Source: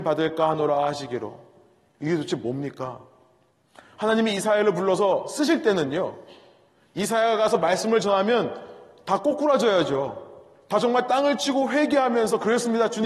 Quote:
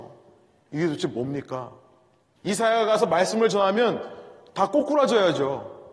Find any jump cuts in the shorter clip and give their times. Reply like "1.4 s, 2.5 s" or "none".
2.4 s